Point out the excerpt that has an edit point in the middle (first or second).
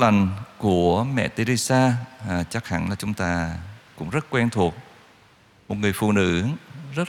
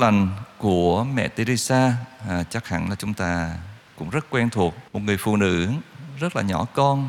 second